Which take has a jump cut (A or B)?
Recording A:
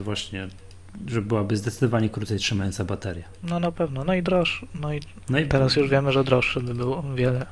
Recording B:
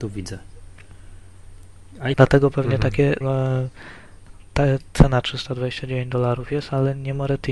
B